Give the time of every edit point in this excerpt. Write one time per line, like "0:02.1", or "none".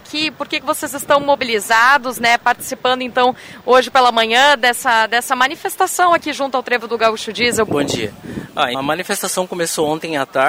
0:07.7
0:08.7